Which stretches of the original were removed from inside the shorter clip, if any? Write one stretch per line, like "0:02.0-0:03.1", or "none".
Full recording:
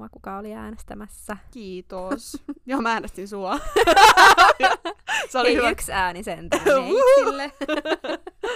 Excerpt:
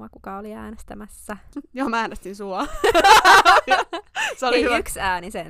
0:01.5-0:02.4